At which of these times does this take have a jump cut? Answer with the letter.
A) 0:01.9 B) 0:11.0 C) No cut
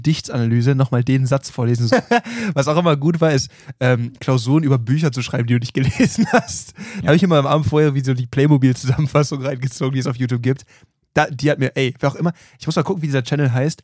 A